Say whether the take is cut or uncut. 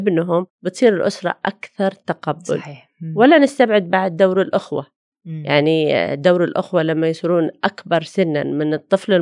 uncut